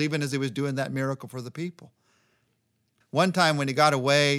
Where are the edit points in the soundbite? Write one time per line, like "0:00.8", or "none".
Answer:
0:03.0